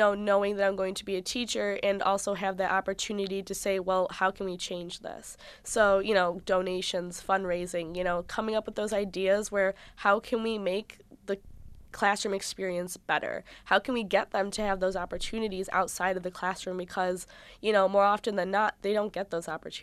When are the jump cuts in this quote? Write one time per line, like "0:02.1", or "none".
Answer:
none